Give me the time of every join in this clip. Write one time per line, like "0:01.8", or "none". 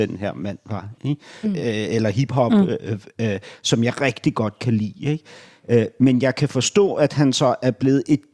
0:01.4